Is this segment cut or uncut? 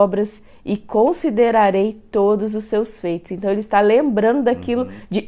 uncut